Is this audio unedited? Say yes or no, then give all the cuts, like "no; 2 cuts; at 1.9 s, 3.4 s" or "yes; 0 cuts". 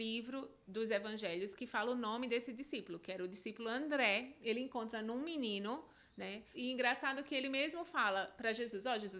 no; 1 cut; at 6.5 s